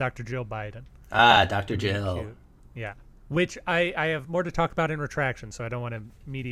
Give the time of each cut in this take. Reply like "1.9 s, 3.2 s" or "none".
none